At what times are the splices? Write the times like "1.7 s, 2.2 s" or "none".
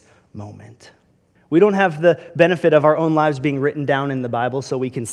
1.4 s